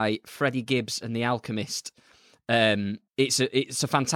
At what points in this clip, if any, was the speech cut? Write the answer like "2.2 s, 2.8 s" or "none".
3.1 s